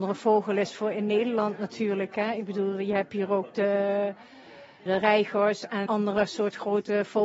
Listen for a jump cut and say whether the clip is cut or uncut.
cut